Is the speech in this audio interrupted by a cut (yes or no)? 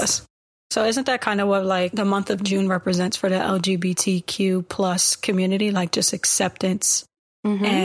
no